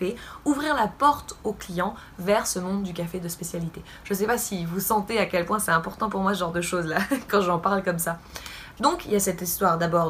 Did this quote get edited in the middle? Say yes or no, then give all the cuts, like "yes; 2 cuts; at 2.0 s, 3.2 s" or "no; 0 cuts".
yes; 1 cut; at 8.8 s